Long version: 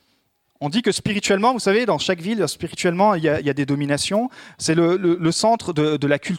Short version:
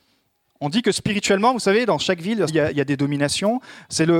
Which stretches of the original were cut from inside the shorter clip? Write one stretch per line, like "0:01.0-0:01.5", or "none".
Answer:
0:02.5-0:03.2

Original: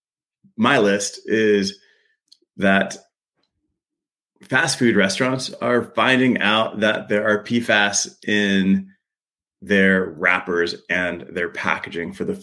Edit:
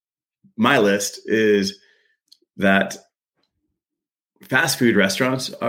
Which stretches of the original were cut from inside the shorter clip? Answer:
none

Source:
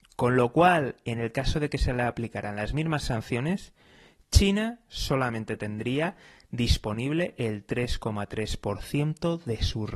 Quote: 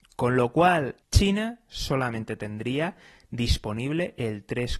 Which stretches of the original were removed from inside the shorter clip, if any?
0:01.0-0:04.2

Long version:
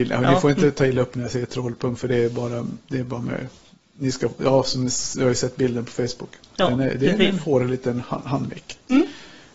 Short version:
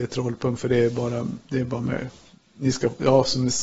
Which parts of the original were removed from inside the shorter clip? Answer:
none

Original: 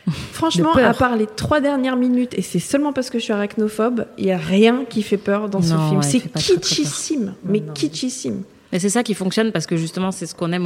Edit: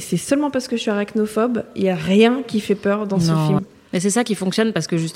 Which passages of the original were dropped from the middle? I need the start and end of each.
0:06.0-0:08.4

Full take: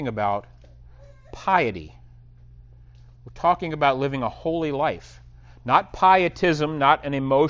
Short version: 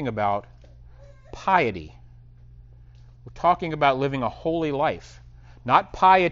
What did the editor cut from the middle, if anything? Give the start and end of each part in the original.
none

